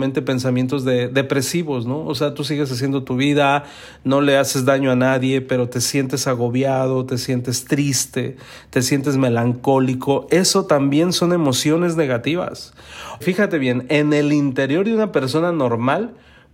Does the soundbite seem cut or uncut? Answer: cut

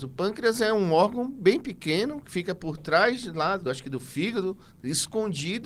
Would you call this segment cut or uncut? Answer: uncut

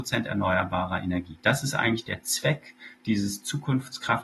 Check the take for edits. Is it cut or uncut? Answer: uncut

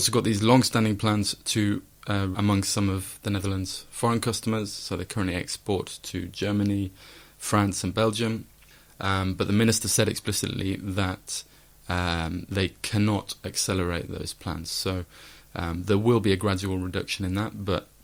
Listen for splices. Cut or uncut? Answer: cut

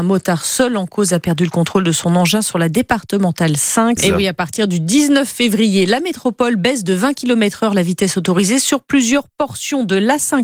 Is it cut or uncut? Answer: cut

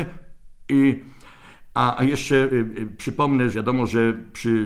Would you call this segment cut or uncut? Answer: cut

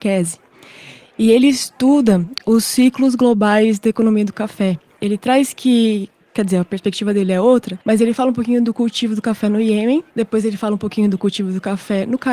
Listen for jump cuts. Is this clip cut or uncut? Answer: cut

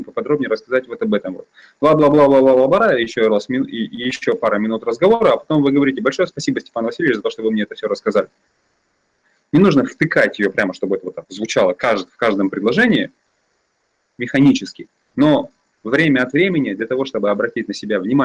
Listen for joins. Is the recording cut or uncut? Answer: uncut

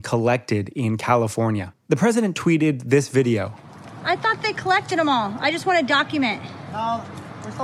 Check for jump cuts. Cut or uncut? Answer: cut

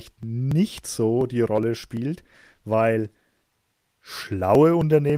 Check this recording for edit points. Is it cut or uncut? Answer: uncut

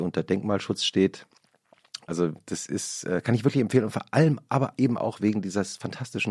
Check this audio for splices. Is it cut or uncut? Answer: cut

